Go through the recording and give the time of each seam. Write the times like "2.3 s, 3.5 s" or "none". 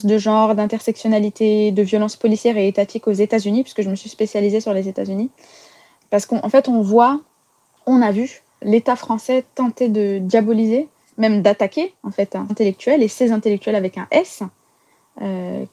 6.0 s, 8.6 s, 12.5 s